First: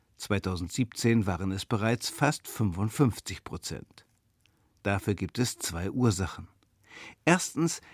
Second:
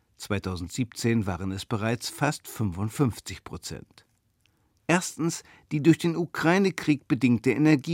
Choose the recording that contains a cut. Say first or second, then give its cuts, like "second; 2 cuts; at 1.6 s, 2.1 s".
second; 1 cut; at 4.8 s